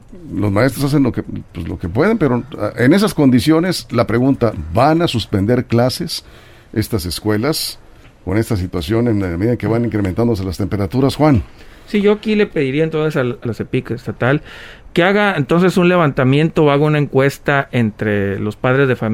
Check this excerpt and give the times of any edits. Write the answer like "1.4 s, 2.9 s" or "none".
13.5 s